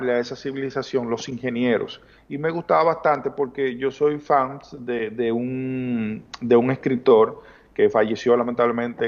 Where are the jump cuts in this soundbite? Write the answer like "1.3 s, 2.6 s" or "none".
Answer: 2.2 s